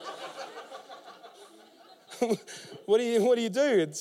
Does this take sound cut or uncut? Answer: uncut